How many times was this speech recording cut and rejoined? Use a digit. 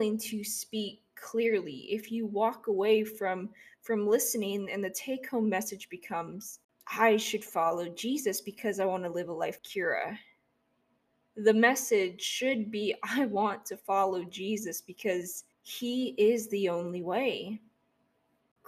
2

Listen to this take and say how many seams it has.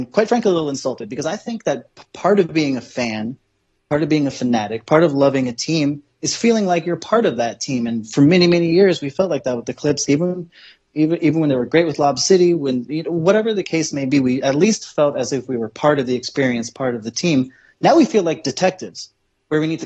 1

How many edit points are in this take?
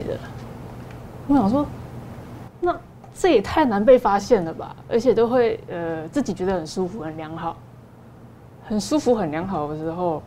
0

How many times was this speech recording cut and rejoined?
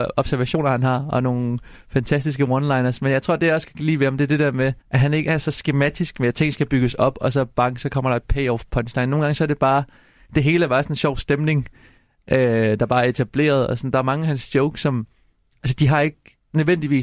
1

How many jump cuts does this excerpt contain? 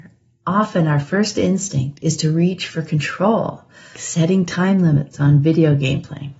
1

